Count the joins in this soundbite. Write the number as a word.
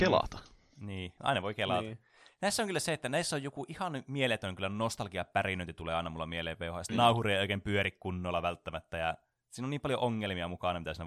one